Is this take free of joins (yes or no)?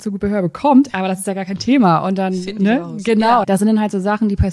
no